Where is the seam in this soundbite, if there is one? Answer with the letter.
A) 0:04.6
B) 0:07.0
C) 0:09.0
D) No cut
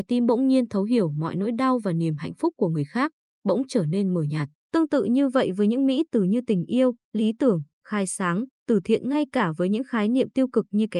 A